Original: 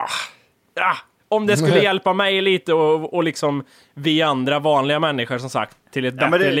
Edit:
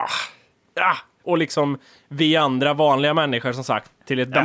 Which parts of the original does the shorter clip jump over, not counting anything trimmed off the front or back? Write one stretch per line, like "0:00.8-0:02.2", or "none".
0:01.2-0:03.1